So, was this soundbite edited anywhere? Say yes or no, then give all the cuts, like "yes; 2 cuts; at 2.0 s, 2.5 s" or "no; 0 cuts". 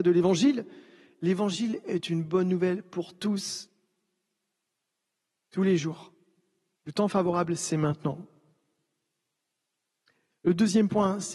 yes; 1 cut; at 6.7 s